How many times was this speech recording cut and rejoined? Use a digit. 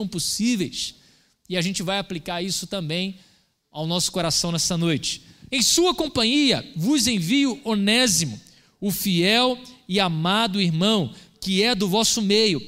1